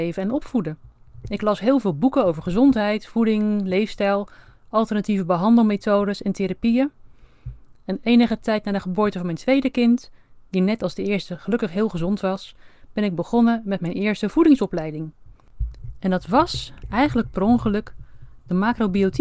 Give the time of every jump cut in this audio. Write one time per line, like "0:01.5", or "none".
none